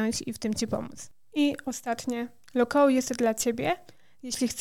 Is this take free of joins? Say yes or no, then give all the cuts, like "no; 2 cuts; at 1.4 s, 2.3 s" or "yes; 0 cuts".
yes; 0 cuts